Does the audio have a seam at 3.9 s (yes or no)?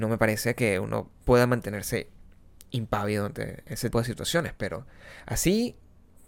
yes